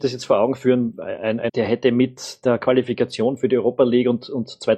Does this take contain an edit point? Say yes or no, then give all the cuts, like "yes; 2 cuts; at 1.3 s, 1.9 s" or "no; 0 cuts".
yes; 1 cut; at 1.5 s